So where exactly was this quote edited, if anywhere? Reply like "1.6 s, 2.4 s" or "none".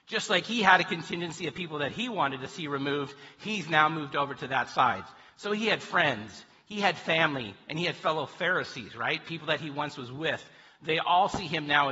none